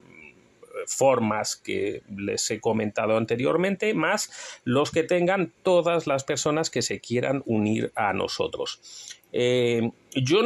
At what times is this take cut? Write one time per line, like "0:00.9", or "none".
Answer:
none